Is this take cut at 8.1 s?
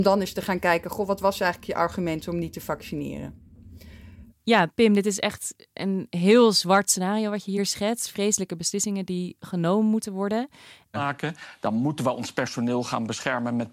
no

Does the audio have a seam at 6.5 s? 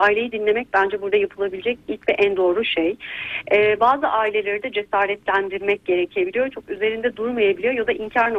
yes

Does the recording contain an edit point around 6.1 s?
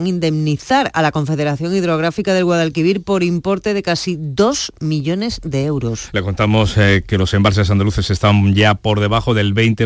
no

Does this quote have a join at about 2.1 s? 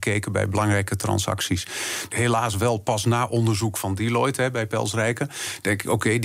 yes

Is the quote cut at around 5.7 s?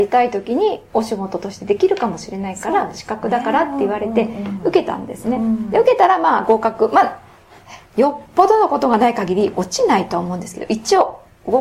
no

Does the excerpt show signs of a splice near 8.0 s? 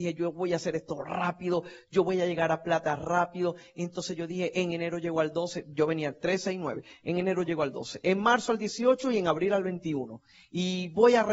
yes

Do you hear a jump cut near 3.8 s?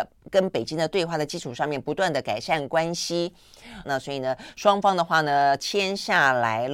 yes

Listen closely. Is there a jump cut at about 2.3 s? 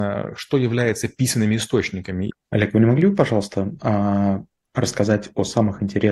yes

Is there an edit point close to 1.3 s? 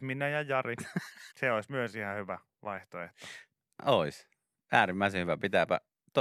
yes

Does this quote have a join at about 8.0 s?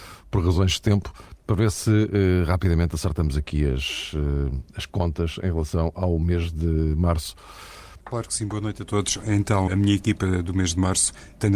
yes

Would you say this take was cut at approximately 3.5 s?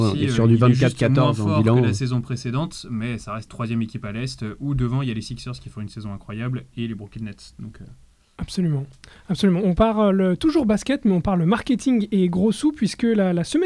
yes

